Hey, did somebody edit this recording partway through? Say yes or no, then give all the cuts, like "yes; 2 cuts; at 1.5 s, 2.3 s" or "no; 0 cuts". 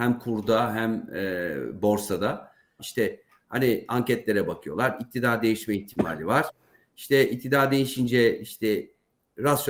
yes; 1 cut; at 2.8 s